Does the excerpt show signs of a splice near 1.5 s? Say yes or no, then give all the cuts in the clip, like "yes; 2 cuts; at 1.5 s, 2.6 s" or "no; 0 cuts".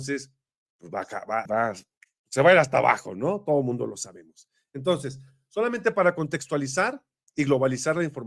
yes; 1 cut; at 1.5 s